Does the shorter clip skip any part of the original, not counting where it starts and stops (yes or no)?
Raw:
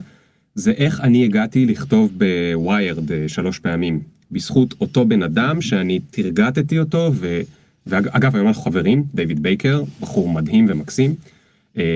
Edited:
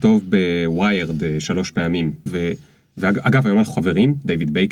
yes